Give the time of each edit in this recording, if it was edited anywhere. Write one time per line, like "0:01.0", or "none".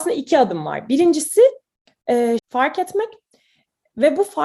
0:02.4